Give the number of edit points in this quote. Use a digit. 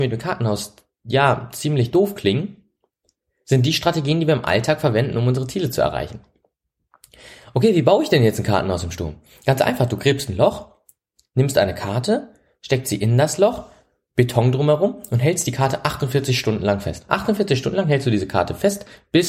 0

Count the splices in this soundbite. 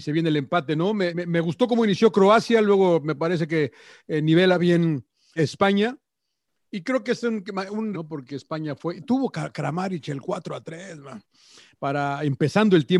3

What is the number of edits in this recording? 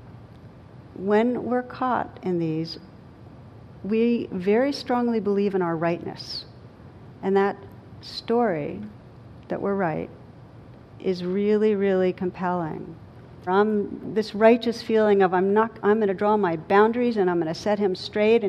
1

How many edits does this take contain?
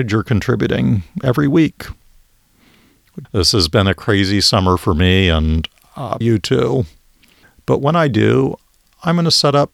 2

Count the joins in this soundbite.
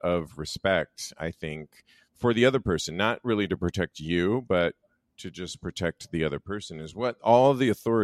0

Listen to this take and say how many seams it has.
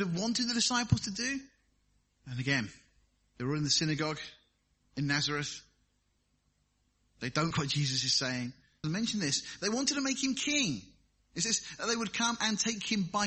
2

